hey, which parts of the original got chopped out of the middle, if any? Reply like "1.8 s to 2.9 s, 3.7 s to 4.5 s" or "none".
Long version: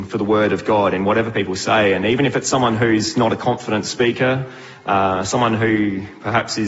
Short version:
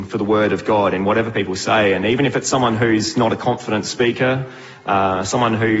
none